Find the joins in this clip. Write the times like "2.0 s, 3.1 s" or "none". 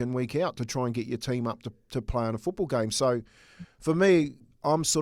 none